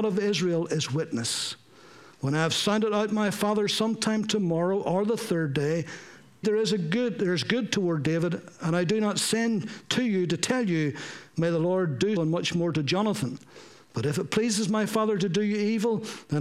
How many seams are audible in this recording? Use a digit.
2